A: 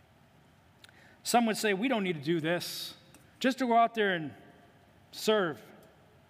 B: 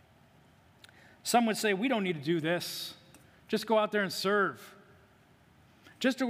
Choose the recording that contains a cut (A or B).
A